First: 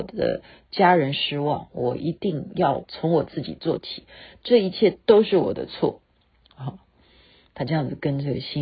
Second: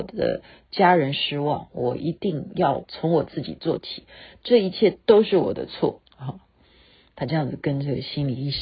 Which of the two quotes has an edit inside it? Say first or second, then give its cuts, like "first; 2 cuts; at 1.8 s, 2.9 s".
second; 1 cut; at 6.1 s